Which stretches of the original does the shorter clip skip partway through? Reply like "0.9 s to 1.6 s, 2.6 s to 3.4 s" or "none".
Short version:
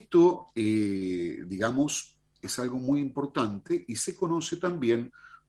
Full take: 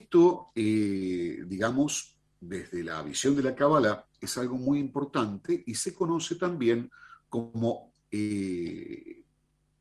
2.3 s to 4.1 s